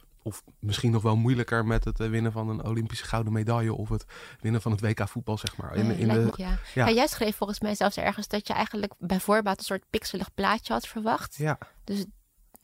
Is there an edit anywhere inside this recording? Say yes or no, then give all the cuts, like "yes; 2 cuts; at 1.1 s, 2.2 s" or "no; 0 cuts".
yes; 1 cut; at 6.3 s